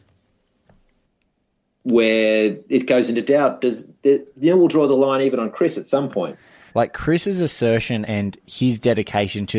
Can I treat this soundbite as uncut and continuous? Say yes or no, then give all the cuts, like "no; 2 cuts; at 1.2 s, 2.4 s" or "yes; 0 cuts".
no; 2 cuts; at 6.7 s, 8.1 s